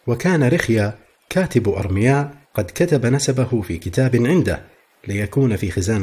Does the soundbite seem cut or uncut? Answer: cut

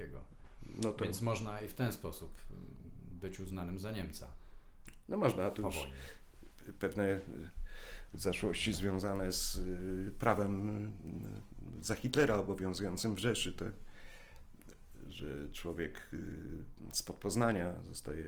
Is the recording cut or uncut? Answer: uncut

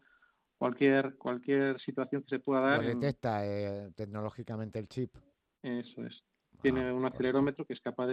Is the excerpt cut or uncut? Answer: uncut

